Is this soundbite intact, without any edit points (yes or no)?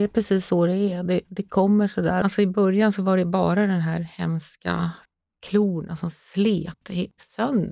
no